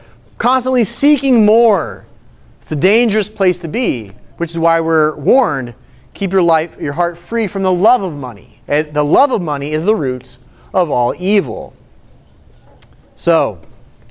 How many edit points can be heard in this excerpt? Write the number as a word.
two